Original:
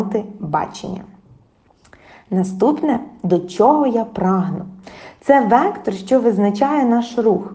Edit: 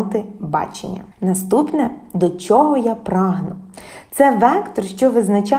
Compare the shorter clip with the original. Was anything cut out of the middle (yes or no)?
yes